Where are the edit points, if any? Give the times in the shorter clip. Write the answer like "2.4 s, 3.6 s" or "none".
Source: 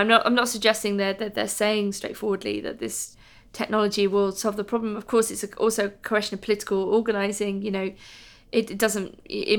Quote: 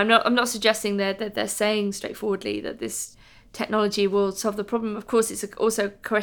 none